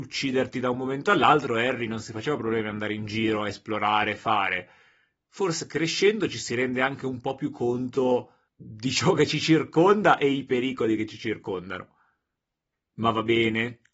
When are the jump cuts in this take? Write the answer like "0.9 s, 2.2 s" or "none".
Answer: 5.2 s